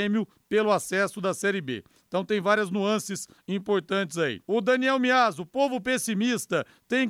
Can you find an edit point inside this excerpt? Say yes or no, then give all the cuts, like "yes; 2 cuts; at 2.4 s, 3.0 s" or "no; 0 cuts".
yes; 1 cut; at 4.4 s